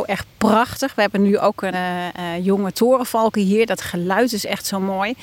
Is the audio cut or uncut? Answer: cut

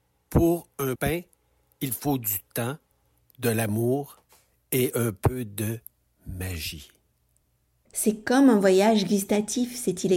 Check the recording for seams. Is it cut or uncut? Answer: cut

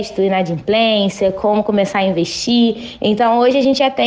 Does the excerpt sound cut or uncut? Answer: cut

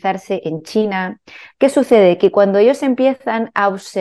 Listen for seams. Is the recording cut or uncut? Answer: cut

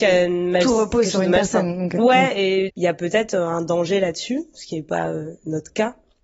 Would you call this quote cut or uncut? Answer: cut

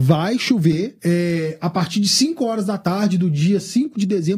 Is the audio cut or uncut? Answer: cut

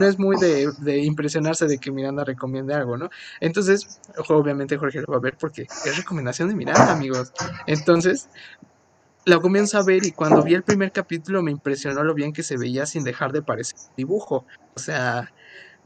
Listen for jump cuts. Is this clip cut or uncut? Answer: uncut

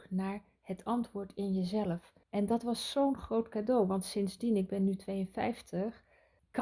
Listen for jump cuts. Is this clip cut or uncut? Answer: cut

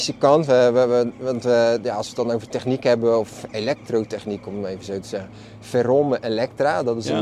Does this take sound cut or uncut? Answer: uncut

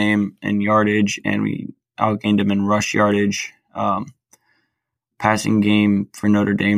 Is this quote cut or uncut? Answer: uncut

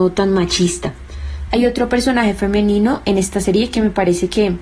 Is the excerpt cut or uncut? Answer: cut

